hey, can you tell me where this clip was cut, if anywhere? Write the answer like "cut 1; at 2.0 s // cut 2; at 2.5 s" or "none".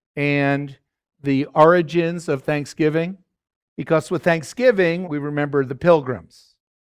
cut 1; at 3.6 s // cut 2; at 5.0 s

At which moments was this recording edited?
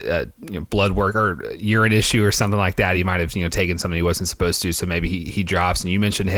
none

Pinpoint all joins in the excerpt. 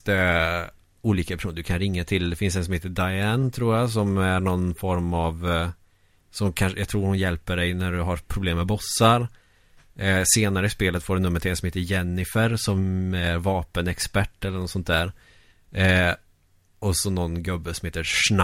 none

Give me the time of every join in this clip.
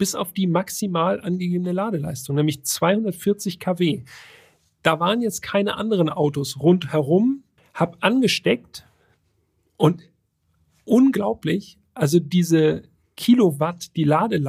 cut 1; at 7.6 s

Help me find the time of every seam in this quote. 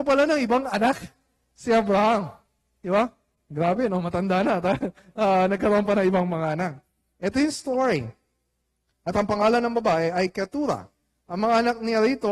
cut 1; at 8.9 s

